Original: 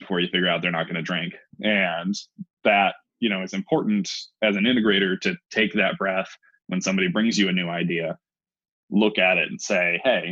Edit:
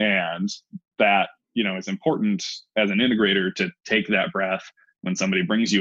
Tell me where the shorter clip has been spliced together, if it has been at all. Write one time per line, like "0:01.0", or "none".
none